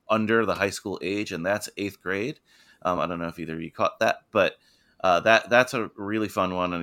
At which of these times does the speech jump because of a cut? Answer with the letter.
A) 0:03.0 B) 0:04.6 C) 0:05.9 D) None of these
D